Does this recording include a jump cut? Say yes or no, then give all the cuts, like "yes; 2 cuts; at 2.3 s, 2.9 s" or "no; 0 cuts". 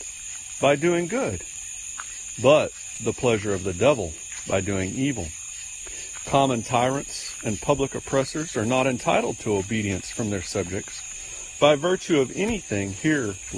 yes; 1 cut; at 6.2 s